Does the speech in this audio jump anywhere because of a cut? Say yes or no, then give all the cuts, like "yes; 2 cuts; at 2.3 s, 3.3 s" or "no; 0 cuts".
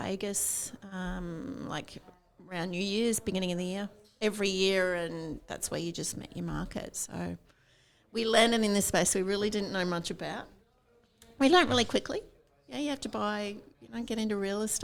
no; 0 cuts